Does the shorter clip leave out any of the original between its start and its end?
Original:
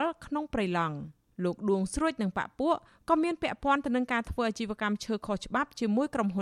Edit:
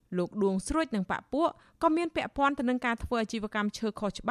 no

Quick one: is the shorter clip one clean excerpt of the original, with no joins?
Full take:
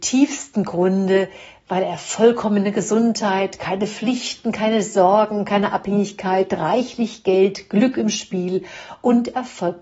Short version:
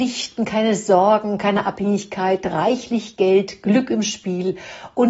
yes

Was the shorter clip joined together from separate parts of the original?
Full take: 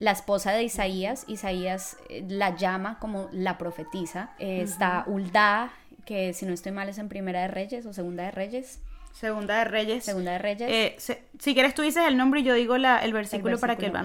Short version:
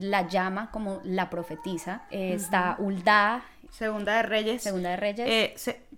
yes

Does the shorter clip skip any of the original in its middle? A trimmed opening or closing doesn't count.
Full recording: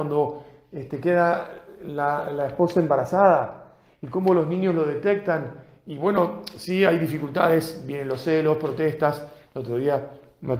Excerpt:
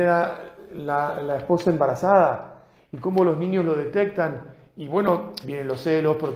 yes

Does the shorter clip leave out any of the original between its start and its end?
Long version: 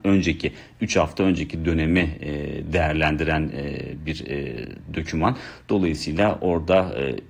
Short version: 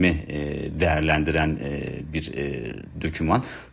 no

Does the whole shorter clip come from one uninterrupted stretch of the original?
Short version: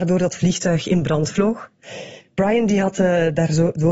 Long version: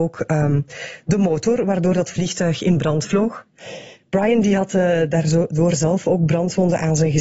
yes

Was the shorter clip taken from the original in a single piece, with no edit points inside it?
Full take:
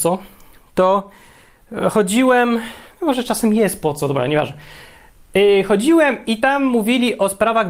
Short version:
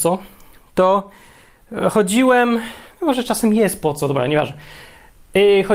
yes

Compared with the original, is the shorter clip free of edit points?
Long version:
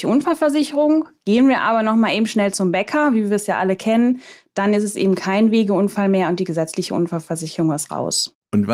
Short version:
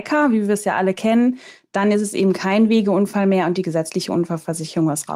yes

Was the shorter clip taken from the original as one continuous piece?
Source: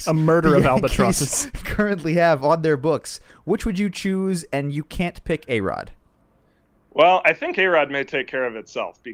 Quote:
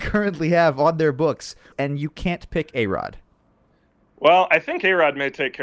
no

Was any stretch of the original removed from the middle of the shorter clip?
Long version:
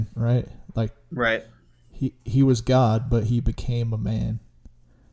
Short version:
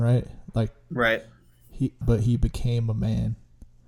yes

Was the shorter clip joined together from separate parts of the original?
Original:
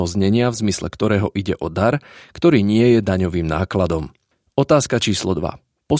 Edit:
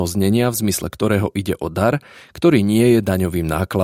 no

